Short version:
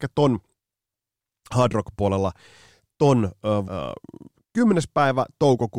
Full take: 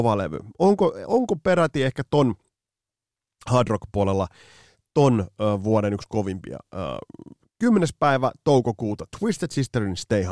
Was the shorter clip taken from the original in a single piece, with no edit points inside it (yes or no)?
no